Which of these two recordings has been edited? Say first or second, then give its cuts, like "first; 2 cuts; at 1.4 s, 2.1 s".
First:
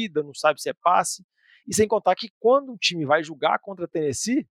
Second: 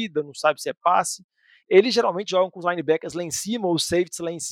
second; 1 cut; at 1.6 s